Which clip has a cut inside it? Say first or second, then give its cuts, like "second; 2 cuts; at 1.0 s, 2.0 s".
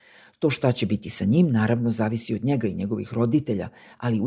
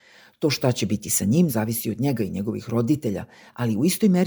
second; 1 cut; at 1.5 s